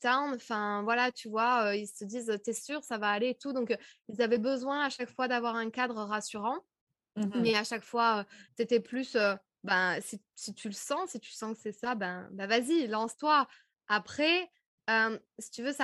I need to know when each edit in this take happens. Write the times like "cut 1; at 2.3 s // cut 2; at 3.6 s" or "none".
cut 1; at 8.5 s